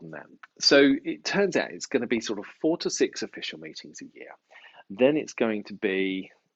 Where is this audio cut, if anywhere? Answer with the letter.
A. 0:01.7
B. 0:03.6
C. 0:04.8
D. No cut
D